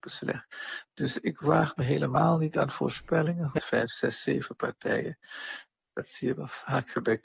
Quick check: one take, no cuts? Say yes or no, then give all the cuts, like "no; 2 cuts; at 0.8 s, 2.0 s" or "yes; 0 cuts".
no; 2 cuts; at 3.6 s, 5.9 s